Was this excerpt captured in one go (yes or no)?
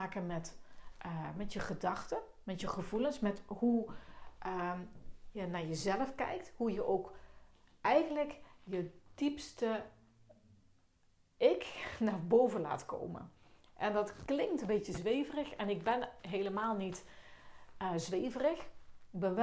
yes